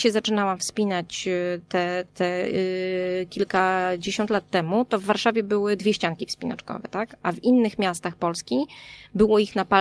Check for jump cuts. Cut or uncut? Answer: uncut